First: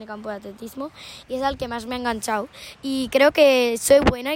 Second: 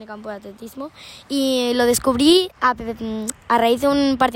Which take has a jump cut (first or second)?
first